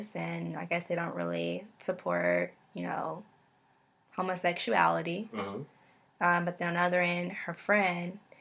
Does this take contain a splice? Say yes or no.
no